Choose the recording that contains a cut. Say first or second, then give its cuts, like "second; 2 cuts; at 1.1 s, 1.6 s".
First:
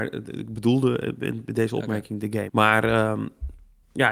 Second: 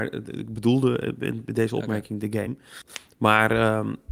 first; 1 cut; at 2.5 s